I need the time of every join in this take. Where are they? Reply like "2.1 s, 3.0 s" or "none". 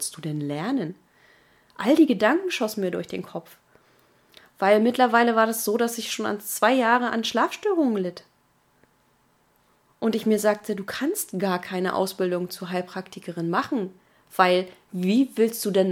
none

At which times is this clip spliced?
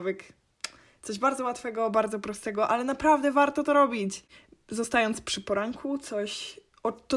none

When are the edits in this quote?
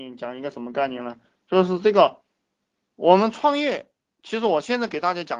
none

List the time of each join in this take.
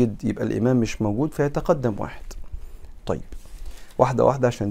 3.0 s

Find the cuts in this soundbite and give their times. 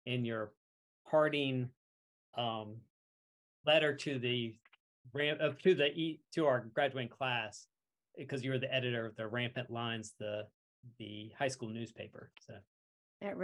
none

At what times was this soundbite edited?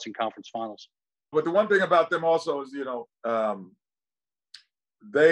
1.3 s, 3.1 s

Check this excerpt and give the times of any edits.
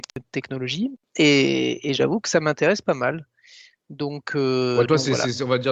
none

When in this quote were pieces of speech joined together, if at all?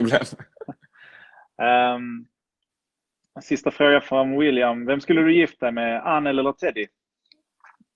none

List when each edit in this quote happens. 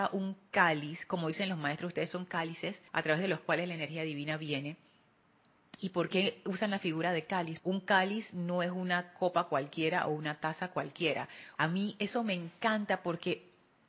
2.9 s, 7.6 s, 11.6 s

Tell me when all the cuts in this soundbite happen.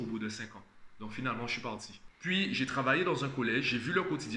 2.1 s

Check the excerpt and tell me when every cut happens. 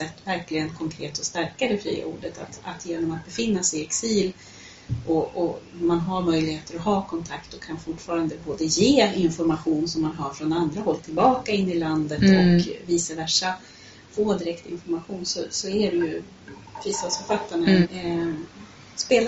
17.8 s

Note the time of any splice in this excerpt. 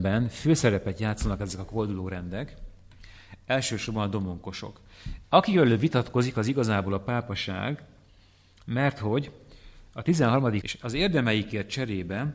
5.2 s, 10.6 s

